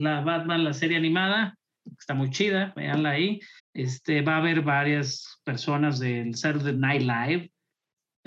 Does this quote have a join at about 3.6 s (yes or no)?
yes